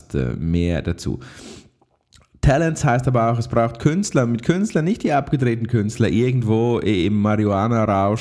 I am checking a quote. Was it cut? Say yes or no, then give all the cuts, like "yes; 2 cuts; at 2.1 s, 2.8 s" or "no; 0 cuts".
no; 0 cuts